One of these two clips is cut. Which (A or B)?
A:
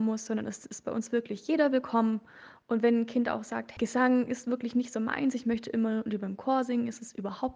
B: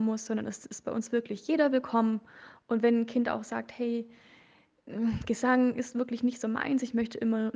A